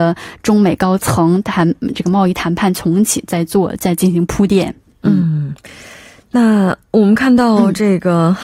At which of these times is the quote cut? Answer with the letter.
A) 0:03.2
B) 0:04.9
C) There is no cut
C